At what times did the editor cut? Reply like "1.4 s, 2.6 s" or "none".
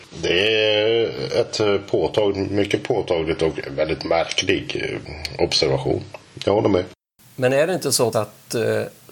8.1 s